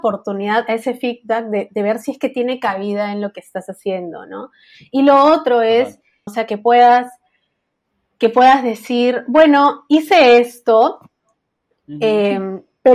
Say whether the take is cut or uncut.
cut